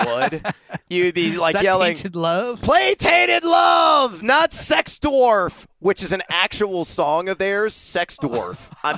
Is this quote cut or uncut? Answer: uncut